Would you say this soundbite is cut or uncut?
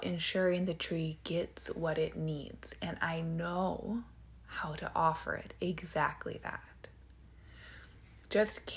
uncut